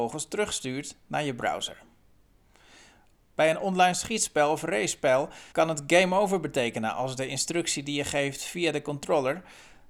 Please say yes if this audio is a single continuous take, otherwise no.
no